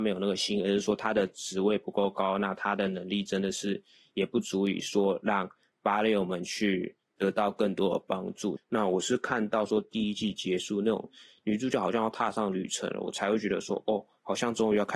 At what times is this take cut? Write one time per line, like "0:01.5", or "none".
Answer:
0:08.6